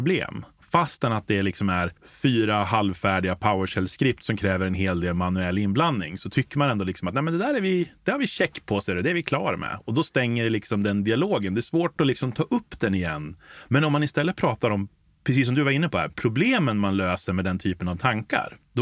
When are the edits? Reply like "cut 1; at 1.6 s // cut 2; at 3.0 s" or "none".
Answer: cut 1; at 2.0 s